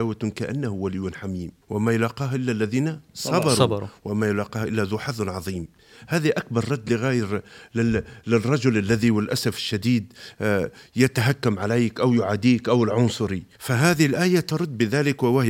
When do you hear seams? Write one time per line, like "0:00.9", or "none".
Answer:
0:01.6
0:13.5